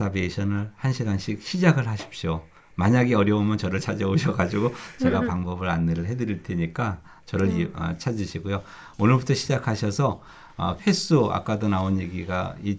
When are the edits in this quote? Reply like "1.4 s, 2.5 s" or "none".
10.8 s